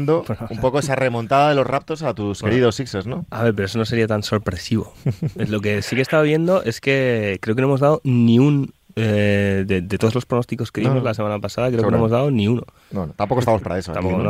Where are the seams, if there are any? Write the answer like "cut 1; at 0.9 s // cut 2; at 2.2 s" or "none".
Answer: none